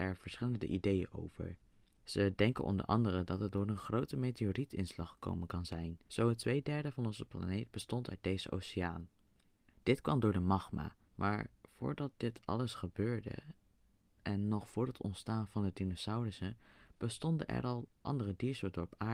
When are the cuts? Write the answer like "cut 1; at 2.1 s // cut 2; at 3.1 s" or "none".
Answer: cut 1; at 6.1 s // cut 2; at 9.7 s // cut 3; at 11.1 s